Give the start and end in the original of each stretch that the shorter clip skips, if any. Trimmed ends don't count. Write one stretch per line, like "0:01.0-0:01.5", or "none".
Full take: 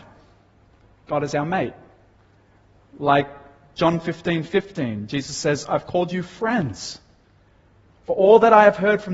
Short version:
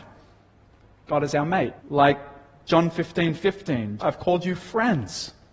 0:01.8-0:02.9
0:05.1-0:05.7